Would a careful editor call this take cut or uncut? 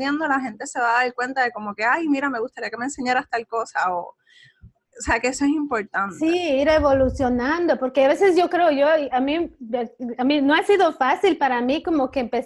uncut